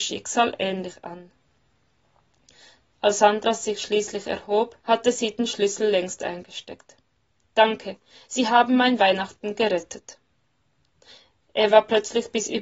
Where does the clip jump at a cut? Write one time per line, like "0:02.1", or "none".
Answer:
0:04.8